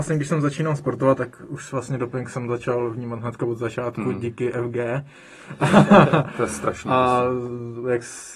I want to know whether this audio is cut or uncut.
uncut